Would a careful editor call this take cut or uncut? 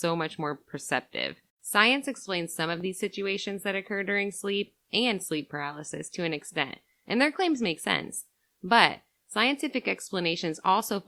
cut